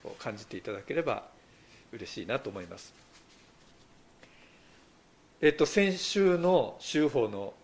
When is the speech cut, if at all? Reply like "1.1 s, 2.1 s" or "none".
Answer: none